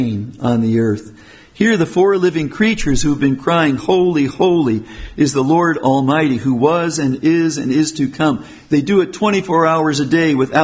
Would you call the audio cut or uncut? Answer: cut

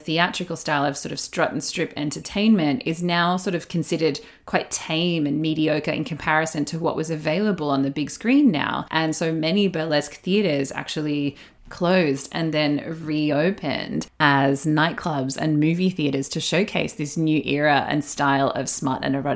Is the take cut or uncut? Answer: uncut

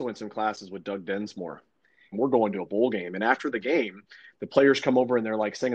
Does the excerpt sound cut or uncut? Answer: cut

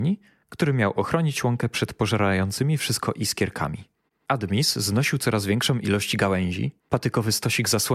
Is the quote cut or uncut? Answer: cut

